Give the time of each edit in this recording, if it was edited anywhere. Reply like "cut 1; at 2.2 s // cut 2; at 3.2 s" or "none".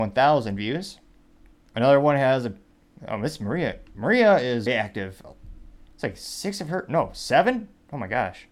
cut 1; at 1.7 s // cut 2; at 4.7 s

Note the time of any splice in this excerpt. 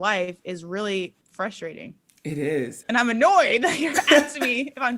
cut 1; at 1.2 s // cut 2; at 2.8 s

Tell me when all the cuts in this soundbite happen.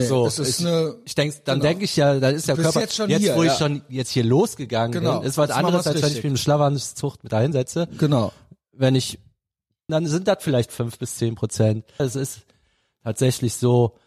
cut 1; at 9.9 s // cut 2; at 12.0 s

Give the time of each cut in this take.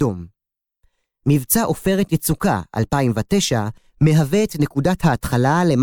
none

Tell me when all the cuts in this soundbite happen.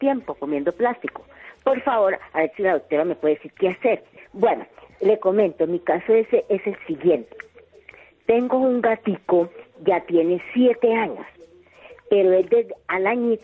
cut 1; at 4.2 s

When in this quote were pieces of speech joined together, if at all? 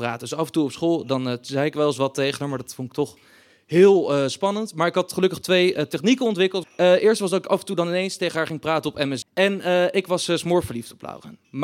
cut 1; at 6.6 s // cut 2; at 9.2 s

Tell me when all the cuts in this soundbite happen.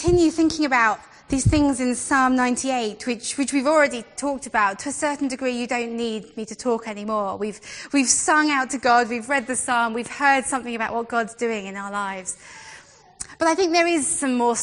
none

